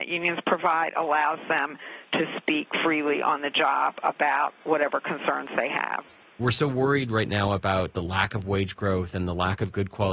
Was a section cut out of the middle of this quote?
no; 0 cuts

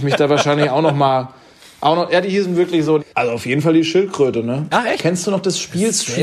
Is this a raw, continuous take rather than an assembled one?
no; 2 cuts; at 3.0 s, 5.0 s

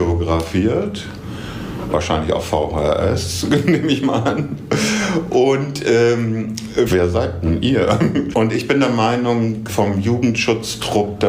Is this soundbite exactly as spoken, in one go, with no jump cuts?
no; 3 cuts; at 6.9 s, 8.3 s, 9.7 s

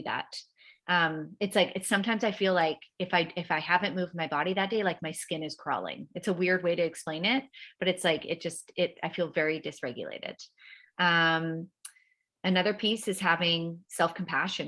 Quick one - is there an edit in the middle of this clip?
no; 0 cuts

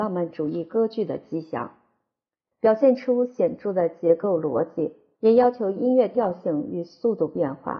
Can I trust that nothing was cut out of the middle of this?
no; 2 cuts; at 2.5 s, 5.1 s

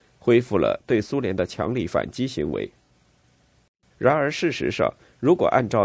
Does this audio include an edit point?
yes; 1 cut; at 3.9 s

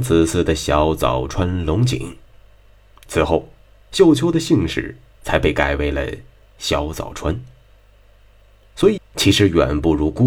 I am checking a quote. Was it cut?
yes; 1 cut; at 9.0 s

